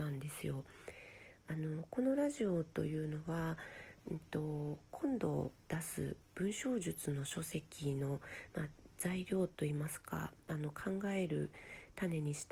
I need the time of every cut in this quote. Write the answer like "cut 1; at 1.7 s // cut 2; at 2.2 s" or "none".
none